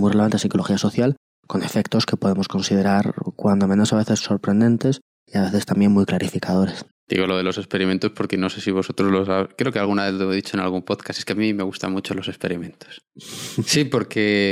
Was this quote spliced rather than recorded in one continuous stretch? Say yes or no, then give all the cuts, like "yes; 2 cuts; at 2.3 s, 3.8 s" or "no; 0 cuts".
yes; 1 cut; at 6.9 s